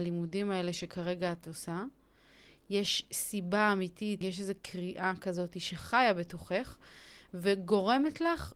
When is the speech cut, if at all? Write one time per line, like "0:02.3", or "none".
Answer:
0:04.2